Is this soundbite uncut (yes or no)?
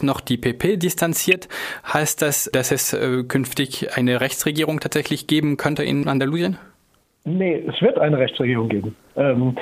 yes